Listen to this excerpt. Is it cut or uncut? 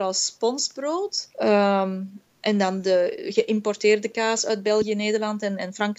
cut